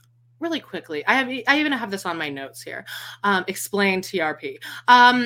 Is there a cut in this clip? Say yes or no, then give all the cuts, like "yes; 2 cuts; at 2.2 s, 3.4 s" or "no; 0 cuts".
no; 0 cuts